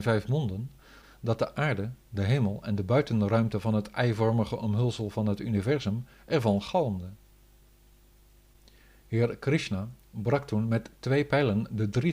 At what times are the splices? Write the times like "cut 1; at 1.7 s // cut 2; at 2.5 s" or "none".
none